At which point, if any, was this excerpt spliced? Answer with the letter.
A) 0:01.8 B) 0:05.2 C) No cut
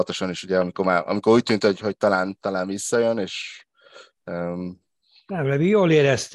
C